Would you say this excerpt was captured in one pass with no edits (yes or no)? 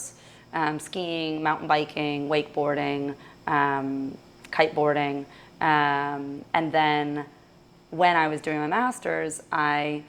yes